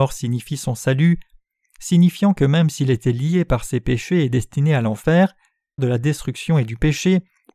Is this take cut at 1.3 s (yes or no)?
no